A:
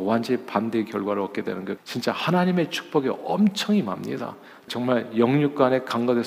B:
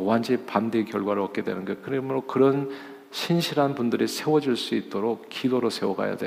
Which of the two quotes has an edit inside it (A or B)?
A